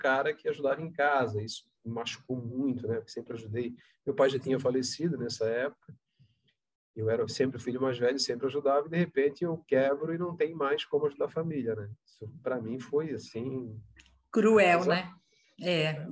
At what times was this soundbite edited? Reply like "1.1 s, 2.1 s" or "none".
none